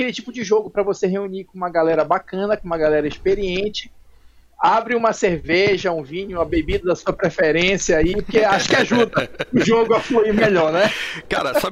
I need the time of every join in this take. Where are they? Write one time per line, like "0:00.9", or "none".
none